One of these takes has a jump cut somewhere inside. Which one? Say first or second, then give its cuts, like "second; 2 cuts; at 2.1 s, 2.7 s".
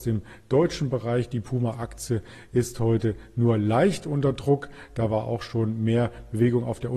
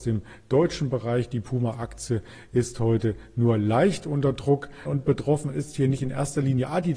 second; 1 cut; at 4.9 s